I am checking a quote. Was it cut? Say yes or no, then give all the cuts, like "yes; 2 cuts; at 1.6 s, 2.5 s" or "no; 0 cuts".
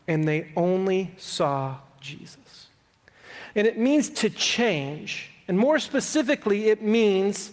yes; 1 cut; at 3.5 s